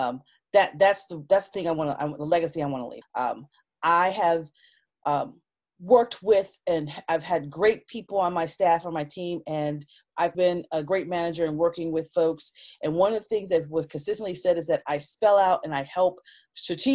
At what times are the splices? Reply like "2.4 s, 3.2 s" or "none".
3.0 s, 10.3 s